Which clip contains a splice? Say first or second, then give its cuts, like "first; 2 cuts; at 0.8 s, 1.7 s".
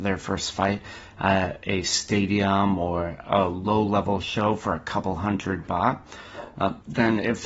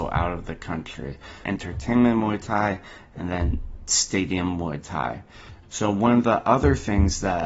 second; 2 cuts; at 1.4 s, 5.6 s